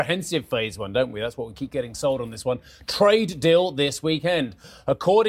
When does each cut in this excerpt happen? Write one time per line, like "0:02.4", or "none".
none